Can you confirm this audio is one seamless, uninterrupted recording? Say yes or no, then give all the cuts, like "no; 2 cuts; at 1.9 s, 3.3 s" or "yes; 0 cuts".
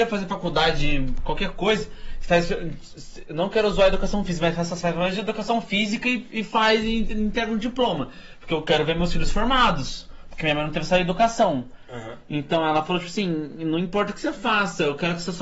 yes; 0 cuts